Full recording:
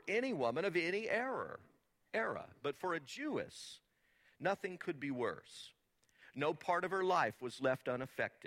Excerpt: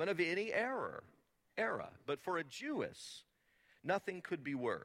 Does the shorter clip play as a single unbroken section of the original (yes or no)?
yes